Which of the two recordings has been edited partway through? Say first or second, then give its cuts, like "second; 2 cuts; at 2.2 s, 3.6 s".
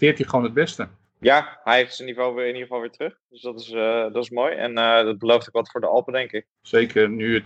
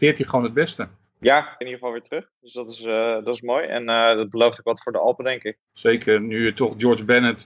second; 1 cut; at 1.6 s